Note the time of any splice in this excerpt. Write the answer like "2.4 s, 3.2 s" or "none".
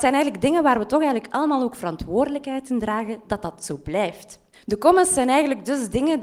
4.5 s